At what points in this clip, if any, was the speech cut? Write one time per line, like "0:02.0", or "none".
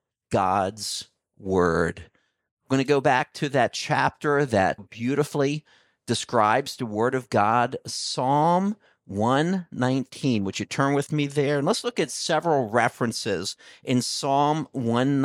0:04.8